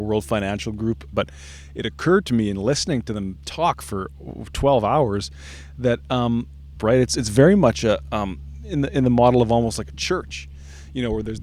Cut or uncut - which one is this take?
cut